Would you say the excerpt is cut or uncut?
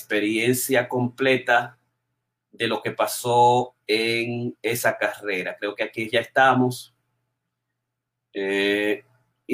uncut